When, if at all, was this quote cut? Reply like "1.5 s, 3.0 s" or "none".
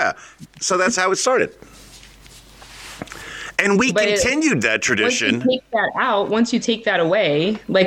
none